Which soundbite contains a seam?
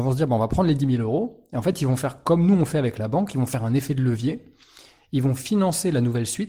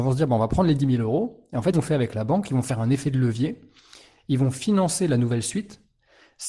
second; 1 cut; at 1.7 s

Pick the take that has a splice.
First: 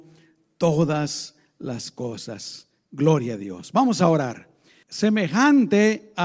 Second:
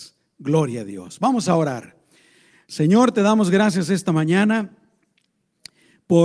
first; 1 cut; at 4.8 s

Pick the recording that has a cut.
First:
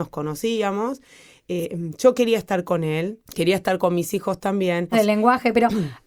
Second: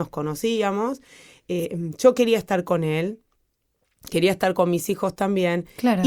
first; 2 cuts; at 3.2 s, 4.9 s

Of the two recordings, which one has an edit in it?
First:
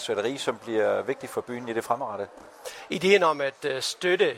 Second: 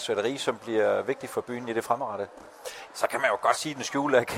second; 1 cut; at 2.9 s

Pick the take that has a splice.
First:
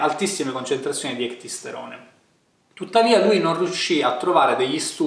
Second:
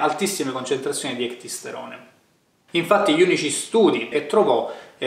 second; 2 cuts; at 2.7 s, 4.1 s

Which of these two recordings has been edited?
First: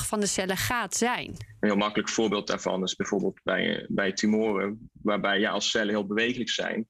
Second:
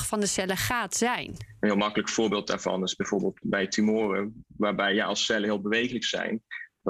second; 1 cut; at 3.4 s

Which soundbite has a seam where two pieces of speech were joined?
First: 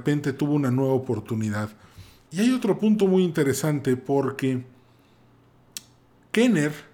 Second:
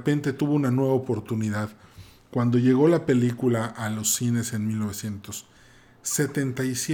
first; 1 cut; at 2.3 s

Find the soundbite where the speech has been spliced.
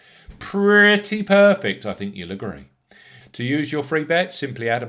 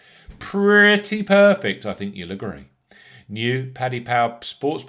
first; 1 cut; at 3.2 s

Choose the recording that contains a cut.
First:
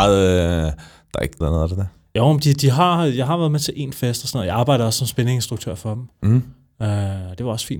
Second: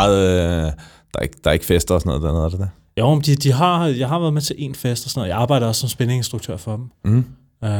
first; 1 cut; at 1.4 s

